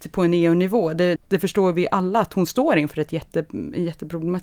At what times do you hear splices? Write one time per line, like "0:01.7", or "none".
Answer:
0:01.2